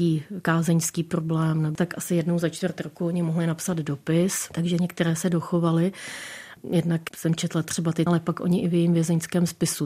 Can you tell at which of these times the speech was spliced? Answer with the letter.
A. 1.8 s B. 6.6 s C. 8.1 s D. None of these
C